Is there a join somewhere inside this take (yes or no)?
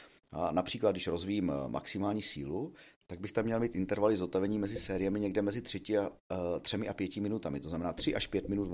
no